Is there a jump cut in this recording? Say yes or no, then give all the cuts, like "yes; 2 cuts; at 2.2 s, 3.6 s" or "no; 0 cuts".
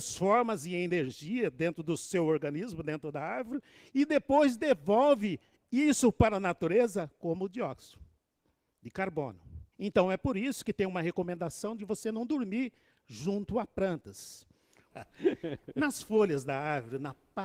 yes; 2 cuts; at 9.7 s, 14.9 s